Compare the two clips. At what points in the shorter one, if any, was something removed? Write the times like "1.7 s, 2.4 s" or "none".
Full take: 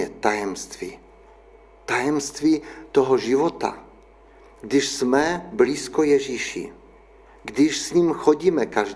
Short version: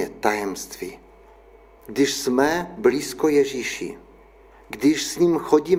1.8 s